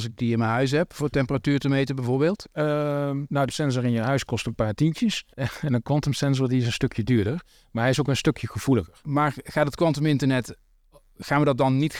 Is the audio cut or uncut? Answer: cut